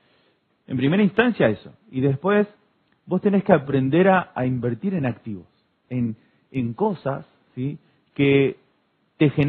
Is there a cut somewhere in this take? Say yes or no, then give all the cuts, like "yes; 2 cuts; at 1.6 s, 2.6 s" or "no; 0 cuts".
no; 0 cuts